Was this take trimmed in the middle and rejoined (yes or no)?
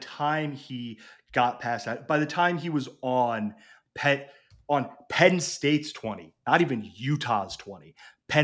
no